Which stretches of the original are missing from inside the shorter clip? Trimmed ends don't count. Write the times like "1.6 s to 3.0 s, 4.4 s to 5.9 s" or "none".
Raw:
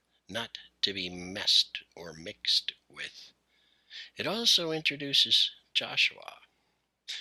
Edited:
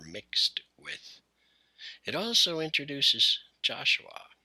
none

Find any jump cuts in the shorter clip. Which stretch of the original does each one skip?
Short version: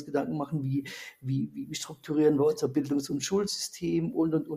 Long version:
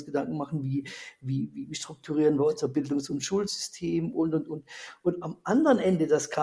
none

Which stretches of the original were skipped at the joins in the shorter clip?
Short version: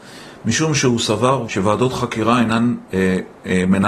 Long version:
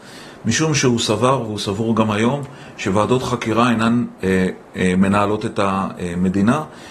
1.5 s to 2.8 s

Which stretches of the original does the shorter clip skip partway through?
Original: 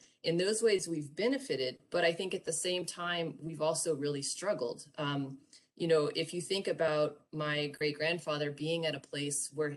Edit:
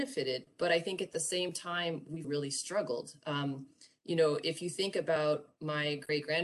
3.6 s to 4.0 s

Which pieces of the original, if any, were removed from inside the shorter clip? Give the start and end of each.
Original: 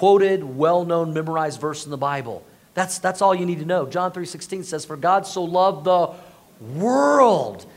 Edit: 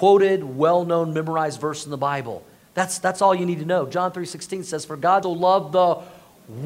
5.2 s to 5.3 s

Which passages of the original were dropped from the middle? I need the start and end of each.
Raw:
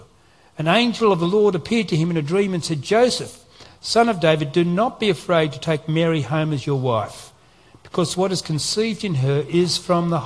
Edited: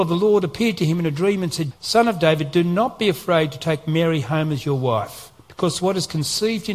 2.8 s to 3.7 s, 7.4 s to 7.7 s

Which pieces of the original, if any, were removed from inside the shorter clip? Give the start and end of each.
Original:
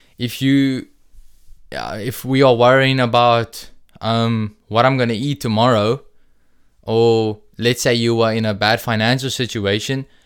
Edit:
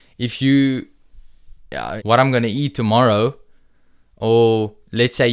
2.0 s to 4.6 s

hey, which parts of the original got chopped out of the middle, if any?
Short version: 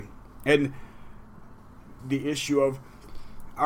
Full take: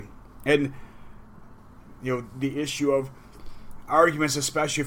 2.0 s to 2.3 s

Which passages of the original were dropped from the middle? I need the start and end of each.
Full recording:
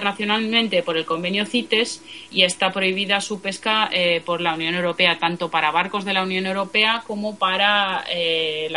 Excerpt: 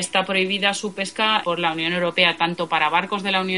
3.9 s to 4.2 s

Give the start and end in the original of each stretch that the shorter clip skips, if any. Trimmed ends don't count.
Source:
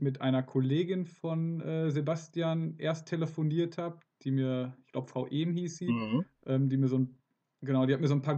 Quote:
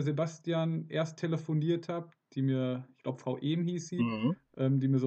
none

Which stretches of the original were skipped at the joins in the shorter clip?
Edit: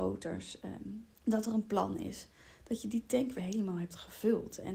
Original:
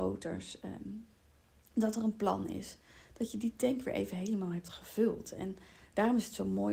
1.1 s to 1.6 s, 3.9 s to 4.1 s

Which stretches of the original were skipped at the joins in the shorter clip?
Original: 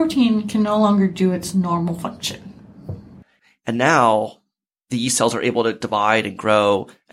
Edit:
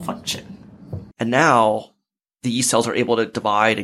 3.1 s to 3.6 s

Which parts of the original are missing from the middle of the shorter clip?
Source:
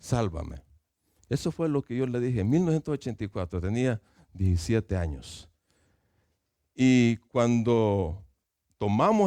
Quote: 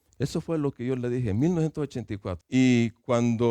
3.5 s to 6.7 s

